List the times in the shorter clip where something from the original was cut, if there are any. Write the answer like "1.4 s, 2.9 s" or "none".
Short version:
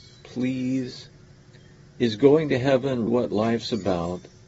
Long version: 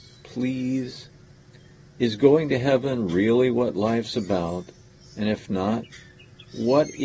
3.1 s